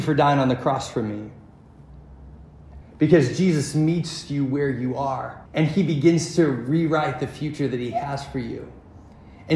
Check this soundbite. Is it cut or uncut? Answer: cut